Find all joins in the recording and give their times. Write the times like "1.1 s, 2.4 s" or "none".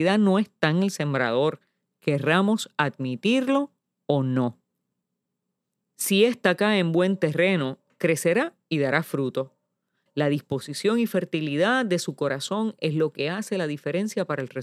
5.9 s, 10.1 s